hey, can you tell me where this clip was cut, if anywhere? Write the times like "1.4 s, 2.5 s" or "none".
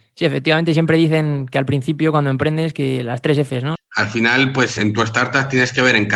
3.7 s, 4.8 s